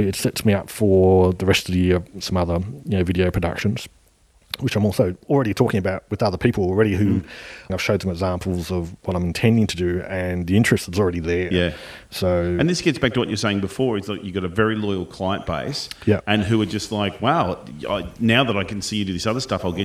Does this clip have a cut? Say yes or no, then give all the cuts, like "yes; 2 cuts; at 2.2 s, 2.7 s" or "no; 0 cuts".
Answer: yes; 1 cut; at 7.7 s